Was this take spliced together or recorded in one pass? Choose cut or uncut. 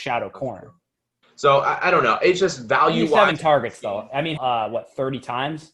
cut